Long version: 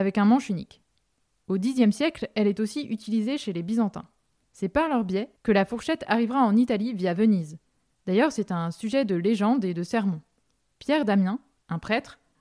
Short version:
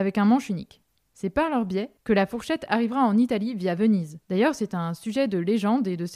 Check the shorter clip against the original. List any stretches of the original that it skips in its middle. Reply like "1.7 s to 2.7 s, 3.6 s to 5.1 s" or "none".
1.0 s to 4.4 s, 7.6 s to 8.0 s